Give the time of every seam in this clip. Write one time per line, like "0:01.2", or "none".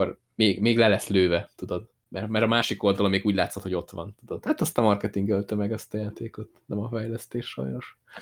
0:04.4